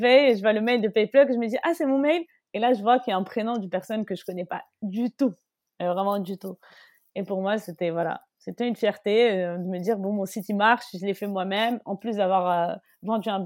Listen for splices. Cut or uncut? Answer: uncut